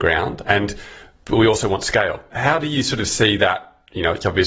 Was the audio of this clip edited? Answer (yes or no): no